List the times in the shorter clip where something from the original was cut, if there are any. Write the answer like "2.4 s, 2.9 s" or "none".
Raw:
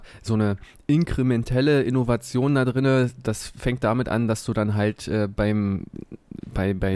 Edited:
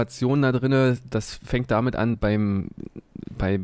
2.1 s